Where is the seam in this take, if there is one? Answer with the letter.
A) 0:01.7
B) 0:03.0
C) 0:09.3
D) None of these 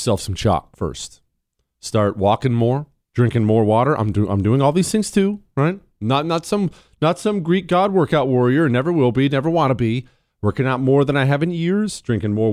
B